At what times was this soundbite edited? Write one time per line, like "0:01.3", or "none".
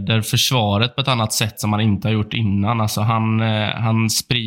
none